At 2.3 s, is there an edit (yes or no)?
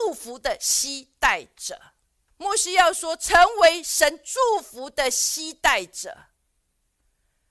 yes